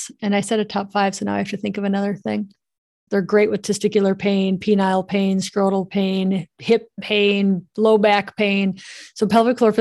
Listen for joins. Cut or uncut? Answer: cut